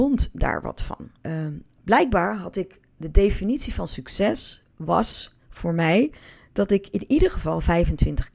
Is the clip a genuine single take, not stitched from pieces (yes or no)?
no